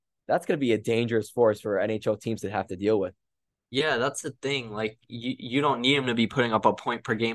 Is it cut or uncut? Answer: uncut